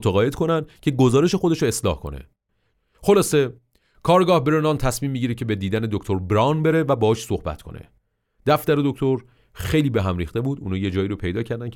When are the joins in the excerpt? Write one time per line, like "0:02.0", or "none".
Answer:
none